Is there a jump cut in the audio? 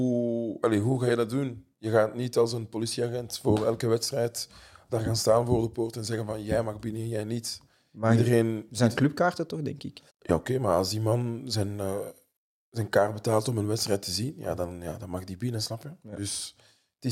yes; 1 cut; at 10.1 s

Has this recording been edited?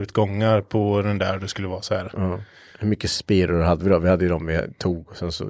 no; 0 cuts

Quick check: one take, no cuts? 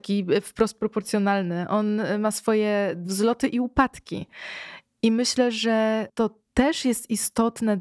yes; 0 cuts

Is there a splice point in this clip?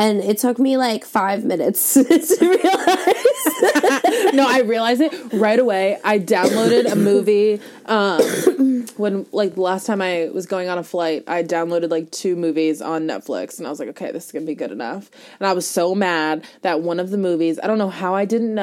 no; 0 cuts

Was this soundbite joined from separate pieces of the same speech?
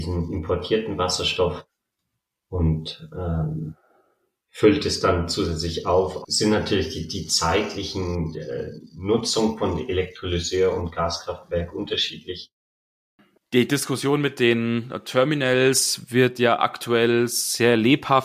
yes; 2 cuts; at 6.2 s, 13.4 s

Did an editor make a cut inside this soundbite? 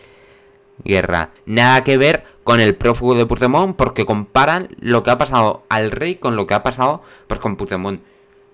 yes; 1 cut; at 1.4 s

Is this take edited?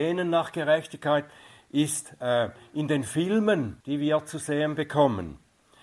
yes; 1 cut; at 3.8 s

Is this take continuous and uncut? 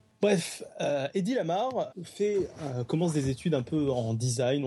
no; 1 cut; at 1.9 s

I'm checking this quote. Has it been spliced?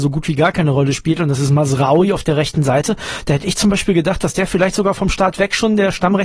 no; 0 cuts

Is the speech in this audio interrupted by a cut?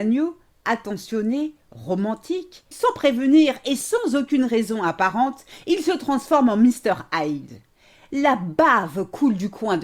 yes; 1 cut; at 2.7 s

